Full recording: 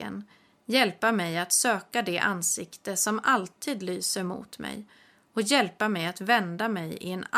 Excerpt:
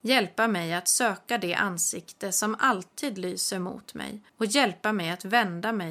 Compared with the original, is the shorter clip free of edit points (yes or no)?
no